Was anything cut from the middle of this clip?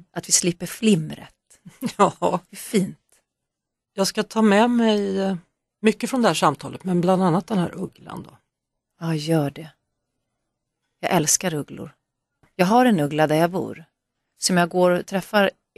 no; 0 cuts

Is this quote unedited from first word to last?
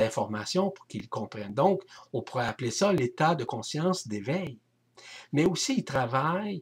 yes; 0 cuts

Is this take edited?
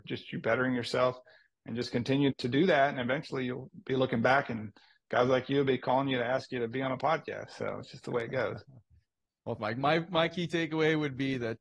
yes; 2 cuts; at 2.3 s, 9.6 s

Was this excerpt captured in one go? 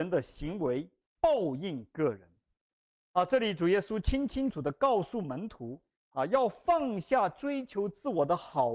no; 2 cuts; at 4.5 s, 6.0 s

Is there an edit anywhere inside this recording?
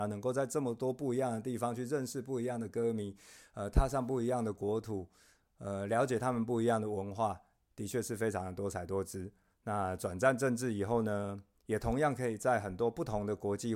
no; 0 cuts

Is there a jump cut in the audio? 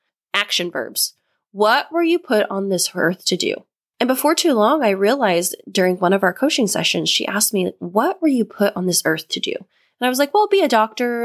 yes; 1 cut; at 3.9 s

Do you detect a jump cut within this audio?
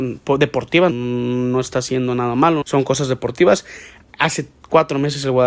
yes; 2 cuts; at 0.9 s, 2.6 s

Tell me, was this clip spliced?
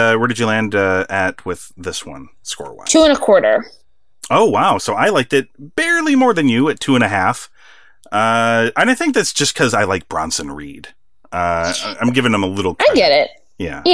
no; 0 cuts

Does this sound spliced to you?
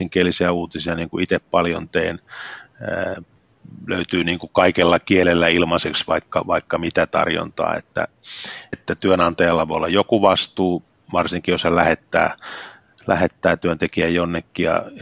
yes; 1 cut; at 8.7 s

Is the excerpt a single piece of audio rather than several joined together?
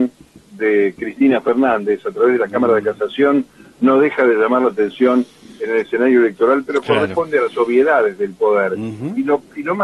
yes; 0 cuts

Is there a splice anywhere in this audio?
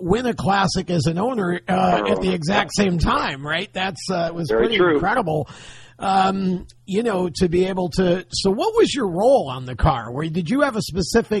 no; 0 cuts

